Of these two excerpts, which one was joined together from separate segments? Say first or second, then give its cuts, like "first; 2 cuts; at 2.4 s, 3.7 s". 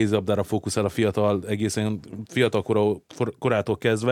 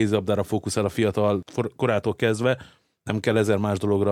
second; 1 cut; at 1.4 s